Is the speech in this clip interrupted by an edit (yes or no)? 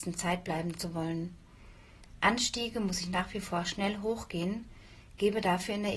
no